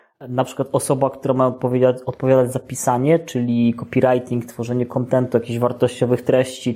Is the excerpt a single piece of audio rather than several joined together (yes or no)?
yes